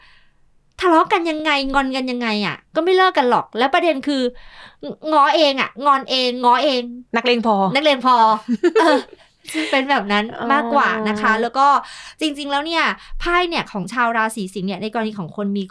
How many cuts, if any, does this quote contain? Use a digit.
0